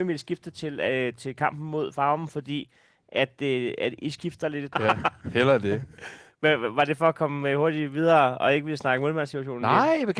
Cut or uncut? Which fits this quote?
cut